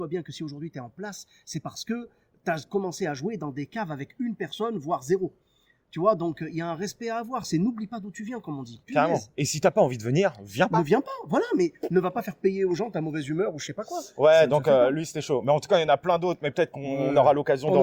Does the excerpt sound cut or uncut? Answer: uncut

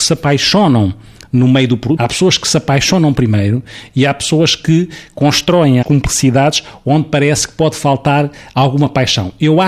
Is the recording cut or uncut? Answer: cut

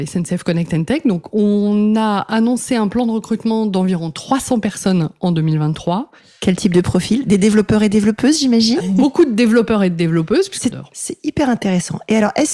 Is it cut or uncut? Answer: cut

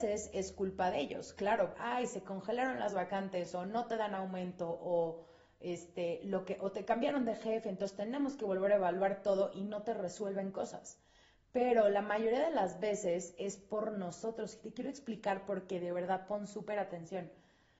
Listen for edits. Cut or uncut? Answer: cut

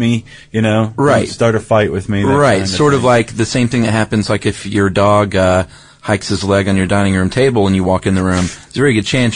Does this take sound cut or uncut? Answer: uncut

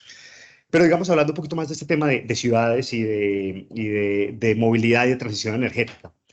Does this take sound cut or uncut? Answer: uncut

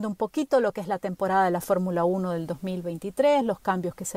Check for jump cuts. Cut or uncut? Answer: uncut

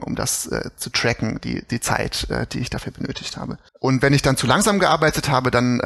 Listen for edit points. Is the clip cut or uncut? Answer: cut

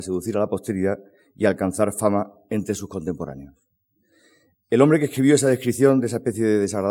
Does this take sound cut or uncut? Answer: uncut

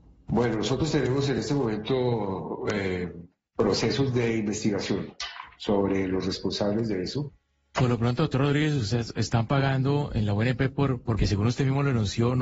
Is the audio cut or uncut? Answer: cut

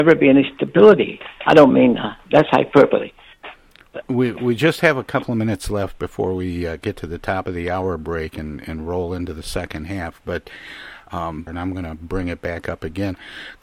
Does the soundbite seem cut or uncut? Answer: cut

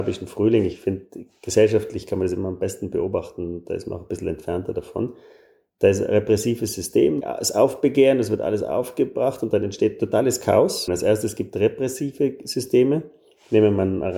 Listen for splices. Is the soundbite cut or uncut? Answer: cut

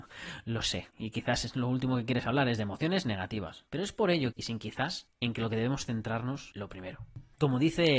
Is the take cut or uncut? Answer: cut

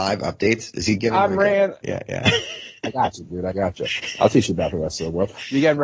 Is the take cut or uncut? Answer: cut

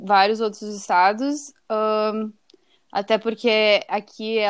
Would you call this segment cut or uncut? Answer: uncut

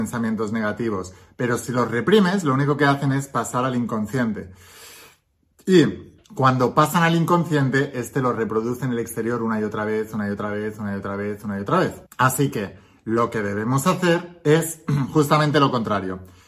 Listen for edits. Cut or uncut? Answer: cut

